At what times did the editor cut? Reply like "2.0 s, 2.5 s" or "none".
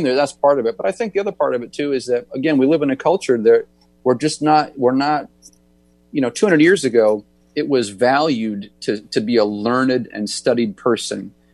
2.3 s